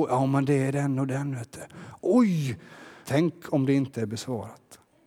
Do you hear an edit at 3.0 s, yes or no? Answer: yes